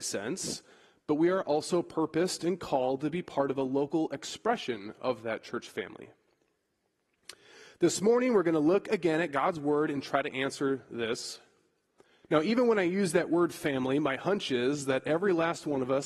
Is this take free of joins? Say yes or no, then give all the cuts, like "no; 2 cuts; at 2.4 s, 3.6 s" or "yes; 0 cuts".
no; 1 cut; at 12.2 s